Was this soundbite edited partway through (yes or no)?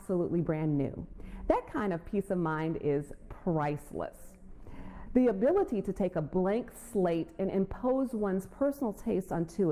yes